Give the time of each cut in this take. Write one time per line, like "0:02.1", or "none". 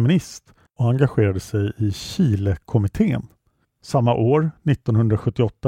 0:03.6